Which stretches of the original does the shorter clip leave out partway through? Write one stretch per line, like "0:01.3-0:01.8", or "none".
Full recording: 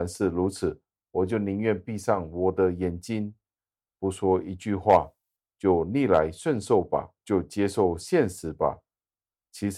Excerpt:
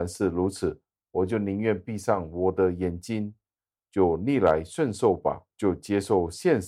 0:03.8-0:05.5